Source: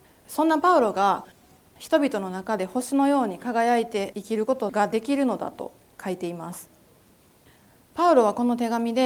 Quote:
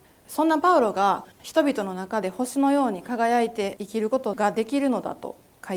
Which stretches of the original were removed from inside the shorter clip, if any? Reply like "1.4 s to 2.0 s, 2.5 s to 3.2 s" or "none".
1.3 s to 1.7 s

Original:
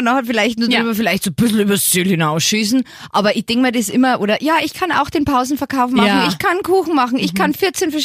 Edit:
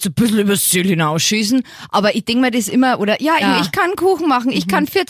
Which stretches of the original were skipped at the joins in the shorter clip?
4.6 s to 6.1 s

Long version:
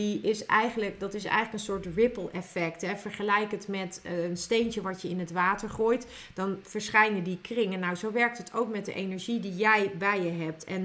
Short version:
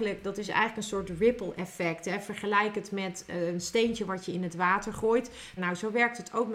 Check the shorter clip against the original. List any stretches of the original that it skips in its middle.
6.3 s to 7.8 s

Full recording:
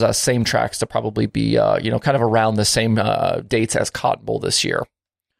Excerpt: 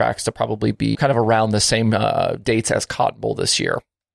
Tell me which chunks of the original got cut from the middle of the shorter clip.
1.5 s to 2.0 s

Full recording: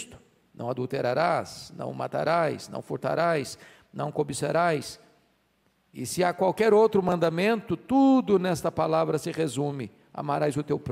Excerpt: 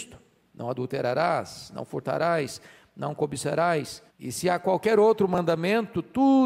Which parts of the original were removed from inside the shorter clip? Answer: 1.7 s to 2.7 s, 5.1 s to 5.8 s

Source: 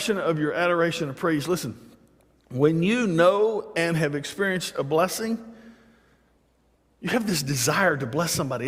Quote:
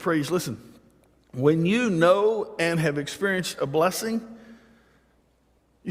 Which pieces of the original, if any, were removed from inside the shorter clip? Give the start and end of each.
none

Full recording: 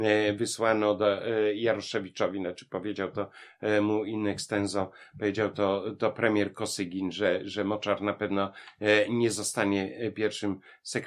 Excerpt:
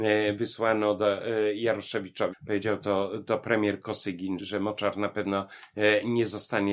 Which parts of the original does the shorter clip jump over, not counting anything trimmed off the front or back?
2.3 s to 5.0 s, 7.1 s to 7.4 s

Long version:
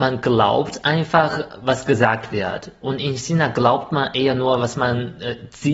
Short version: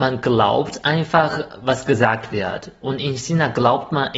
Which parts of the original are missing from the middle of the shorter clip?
none

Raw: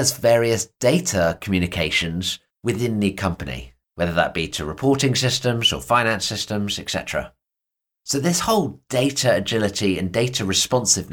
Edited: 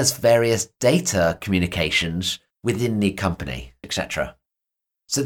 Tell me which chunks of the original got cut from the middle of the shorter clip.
3.8 s to 6.8 s

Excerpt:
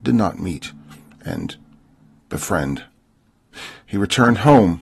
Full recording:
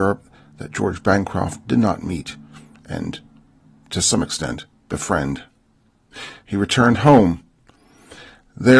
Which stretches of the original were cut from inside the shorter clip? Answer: 3.8 s to 4.8 s

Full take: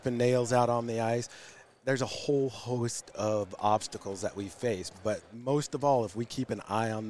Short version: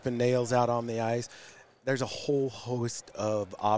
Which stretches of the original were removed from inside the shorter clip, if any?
none

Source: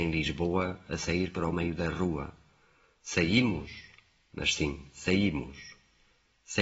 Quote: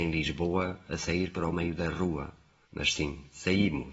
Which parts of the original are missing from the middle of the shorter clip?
2.6 s to 4.3 s

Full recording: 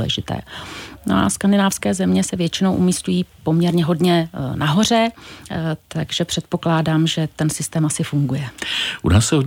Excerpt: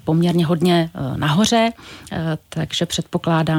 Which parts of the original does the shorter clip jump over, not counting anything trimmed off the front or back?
none

